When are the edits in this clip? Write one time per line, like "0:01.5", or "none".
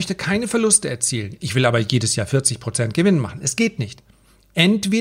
none